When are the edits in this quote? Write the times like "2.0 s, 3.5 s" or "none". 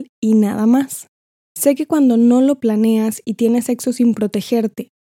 1.4 s